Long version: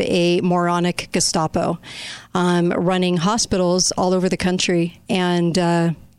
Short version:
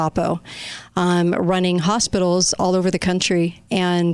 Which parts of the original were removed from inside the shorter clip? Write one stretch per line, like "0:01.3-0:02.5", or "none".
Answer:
none

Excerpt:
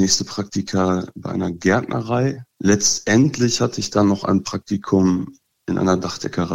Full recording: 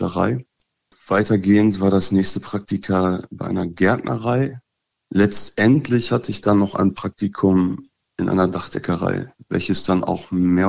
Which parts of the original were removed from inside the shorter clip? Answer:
0:04.7-0:05.0

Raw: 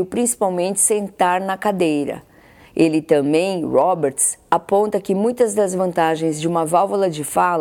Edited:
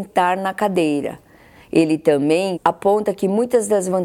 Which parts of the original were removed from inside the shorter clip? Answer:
0:03.6-0:04.4

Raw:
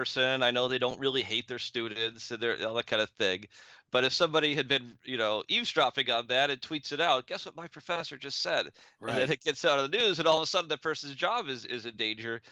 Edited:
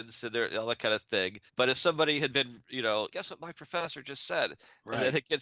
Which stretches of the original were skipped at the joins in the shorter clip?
0:03.5-0:03.8
0:05.5-0:07.3

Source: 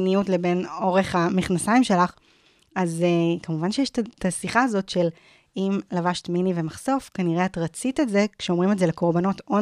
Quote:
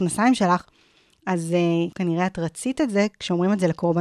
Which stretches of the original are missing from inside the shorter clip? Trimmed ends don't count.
0:03.4-0:07.1

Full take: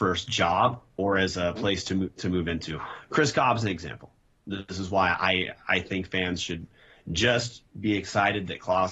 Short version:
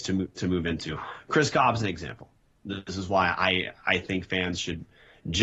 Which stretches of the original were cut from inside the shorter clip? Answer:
none

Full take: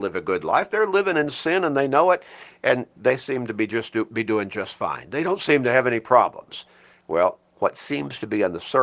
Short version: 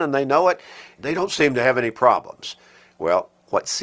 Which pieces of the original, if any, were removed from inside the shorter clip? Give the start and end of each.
0:02.6-0:05.1

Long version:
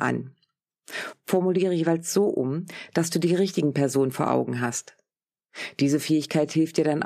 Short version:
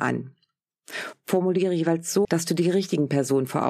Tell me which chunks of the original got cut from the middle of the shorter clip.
0:02.2-0:02.9

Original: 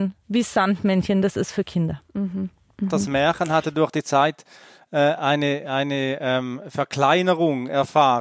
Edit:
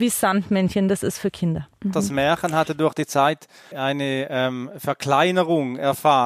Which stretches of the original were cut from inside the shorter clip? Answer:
0:02.0-0:02.7
0:04.7-0:05.6

